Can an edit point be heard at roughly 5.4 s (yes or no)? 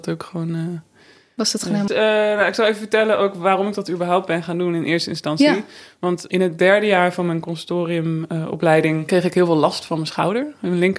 no